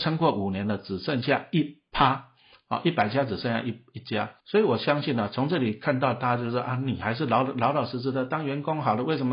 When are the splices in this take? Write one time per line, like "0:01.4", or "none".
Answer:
0:04.4